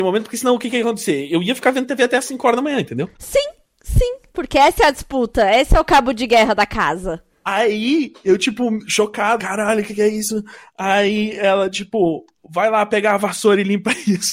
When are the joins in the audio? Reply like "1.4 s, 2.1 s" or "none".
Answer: 9.4 s